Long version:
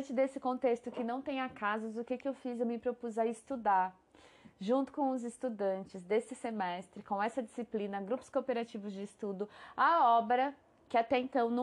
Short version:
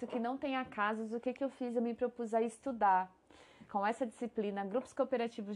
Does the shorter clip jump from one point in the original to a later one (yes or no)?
yes